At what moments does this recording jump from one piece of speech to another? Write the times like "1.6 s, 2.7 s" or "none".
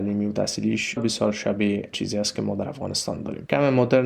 1.0 s